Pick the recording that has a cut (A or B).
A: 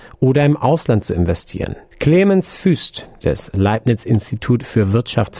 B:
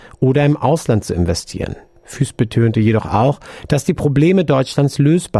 A